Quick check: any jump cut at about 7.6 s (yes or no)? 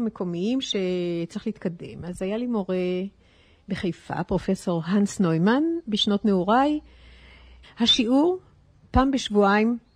yes